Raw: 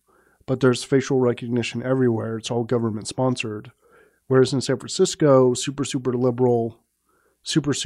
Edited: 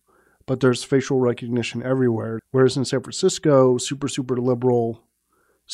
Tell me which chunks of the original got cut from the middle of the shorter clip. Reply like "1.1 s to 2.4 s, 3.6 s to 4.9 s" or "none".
2.4 s to 4.2 s